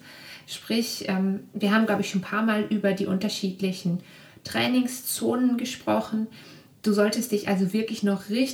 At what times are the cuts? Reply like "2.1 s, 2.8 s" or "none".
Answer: none